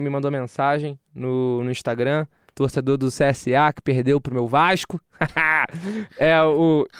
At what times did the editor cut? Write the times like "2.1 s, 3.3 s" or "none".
none